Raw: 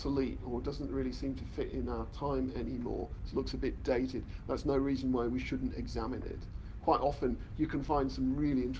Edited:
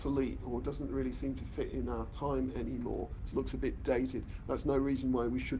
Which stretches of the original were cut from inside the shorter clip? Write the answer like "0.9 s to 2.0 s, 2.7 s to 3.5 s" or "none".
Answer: none